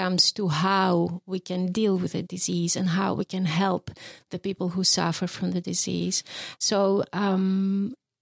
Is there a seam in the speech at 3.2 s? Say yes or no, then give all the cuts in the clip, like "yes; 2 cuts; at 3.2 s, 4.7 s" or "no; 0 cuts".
no; 1 cut; at 6.6 s